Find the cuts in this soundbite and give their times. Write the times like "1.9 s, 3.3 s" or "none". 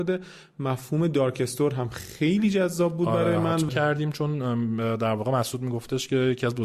3.7 s